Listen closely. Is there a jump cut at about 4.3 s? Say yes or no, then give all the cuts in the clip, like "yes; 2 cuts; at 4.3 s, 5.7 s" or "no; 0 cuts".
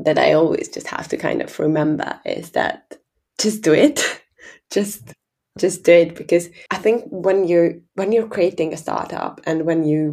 no; 3 cuts; at 5.6 s, 6.7 s, 7.9 s